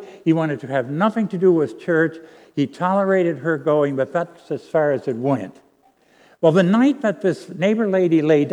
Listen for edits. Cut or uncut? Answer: uncut